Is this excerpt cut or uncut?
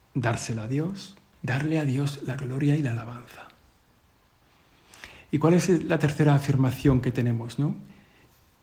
cut